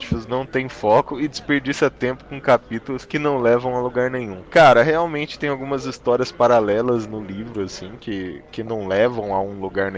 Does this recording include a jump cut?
no; 0 cuts

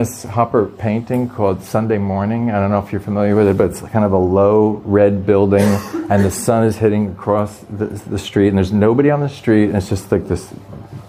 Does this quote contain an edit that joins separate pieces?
no; 0 cuts

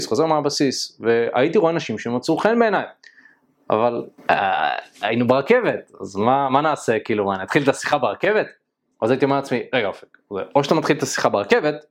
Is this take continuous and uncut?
no; 1 cut; at 4.2 s

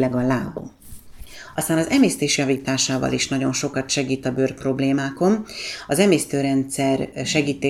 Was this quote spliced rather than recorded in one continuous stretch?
no; 0 cuts

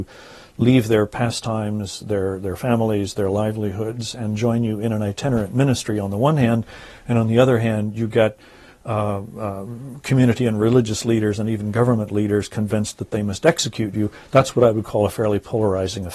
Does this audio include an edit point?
no; 0 cuts

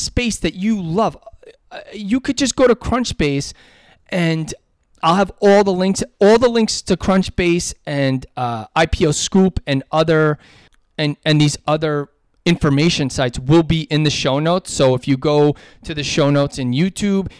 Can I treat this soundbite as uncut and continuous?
yes; 0 cuts

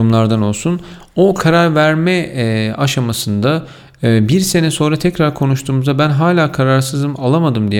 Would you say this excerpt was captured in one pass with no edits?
yes; 0 cuts

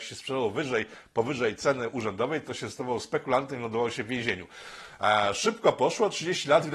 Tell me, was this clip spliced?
no; 0 cuts

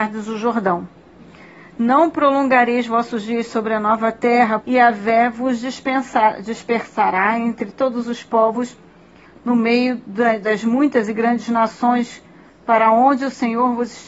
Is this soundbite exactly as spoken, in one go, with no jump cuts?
no; 2 cuts; at 4.6 s, 9.2 s

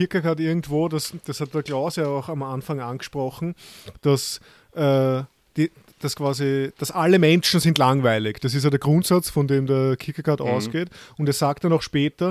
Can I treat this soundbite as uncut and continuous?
yes; 0 cuts

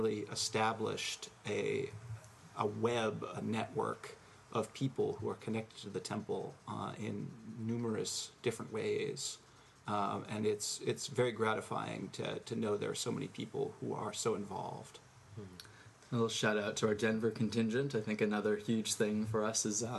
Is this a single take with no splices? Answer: yes; 0 cuts

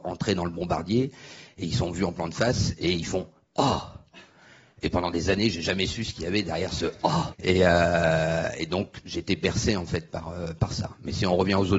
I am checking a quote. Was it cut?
yes; 1 cut; at 7.3 s

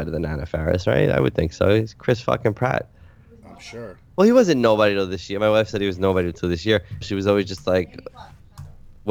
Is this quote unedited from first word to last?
no; 2 cuts; at 4.1 s, 7.0 s

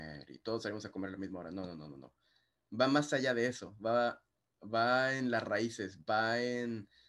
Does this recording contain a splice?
no; 0 cuts

